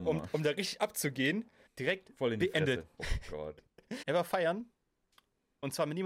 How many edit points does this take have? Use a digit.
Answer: 3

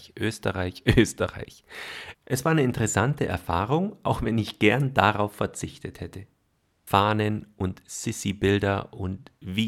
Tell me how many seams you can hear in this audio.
2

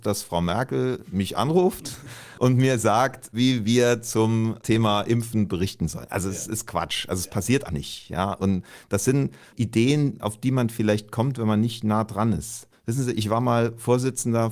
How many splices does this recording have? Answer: 1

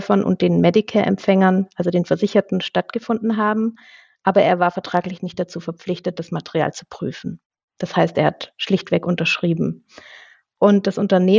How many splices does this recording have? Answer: 0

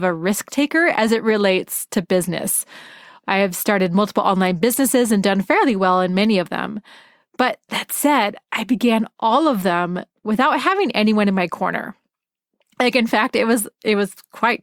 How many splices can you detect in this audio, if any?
0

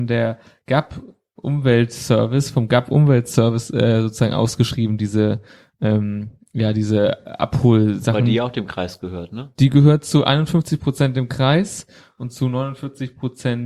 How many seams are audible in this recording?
0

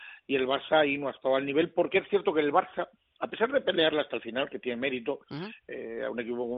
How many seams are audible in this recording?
0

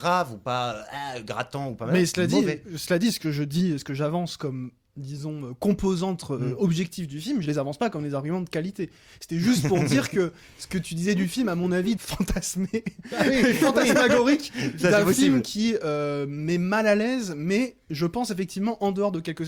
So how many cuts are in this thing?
1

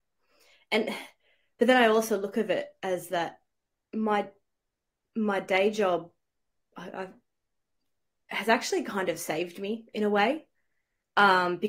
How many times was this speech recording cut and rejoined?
0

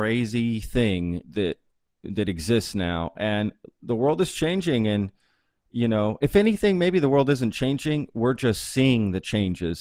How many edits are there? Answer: 1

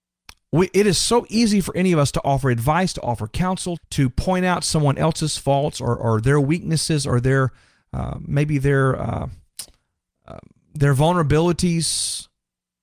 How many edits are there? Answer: 1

